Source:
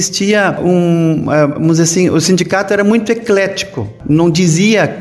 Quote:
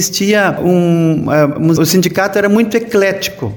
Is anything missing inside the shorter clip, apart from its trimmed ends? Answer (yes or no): yes